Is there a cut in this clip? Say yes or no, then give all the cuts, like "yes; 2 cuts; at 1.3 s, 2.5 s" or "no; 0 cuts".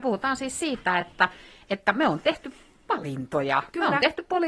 no; 0 cuts